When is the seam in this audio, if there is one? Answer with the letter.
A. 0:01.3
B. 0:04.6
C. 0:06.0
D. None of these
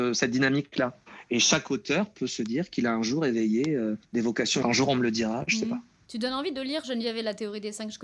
B